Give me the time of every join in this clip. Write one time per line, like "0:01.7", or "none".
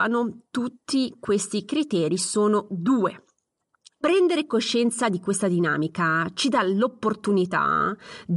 0:04.0